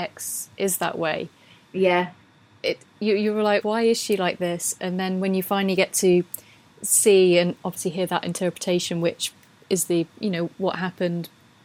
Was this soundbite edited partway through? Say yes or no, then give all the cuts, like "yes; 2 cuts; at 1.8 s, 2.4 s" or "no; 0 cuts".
yes; 1 cut; at 3.6 s